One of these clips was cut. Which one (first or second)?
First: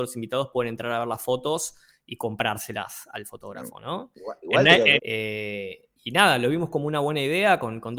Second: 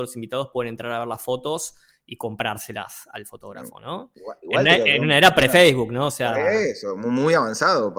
first